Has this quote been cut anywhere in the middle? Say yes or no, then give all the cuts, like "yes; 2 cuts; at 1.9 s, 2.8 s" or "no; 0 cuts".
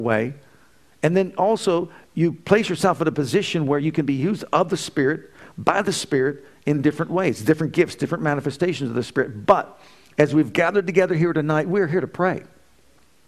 no; 0 cuts